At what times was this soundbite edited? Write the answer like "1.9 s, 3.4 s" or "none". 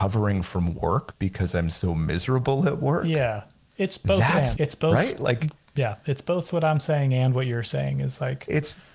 4.5 s